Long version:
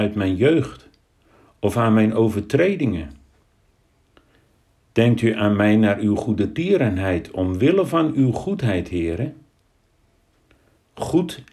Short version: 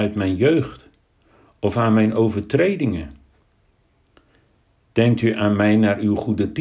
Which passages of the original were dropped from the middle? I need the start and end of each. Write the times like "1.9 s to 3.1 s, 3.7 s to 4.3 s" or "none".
none